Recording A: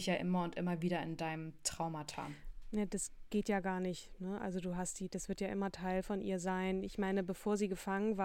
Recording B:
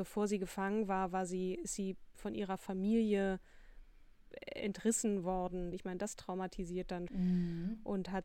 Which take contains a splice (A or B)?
B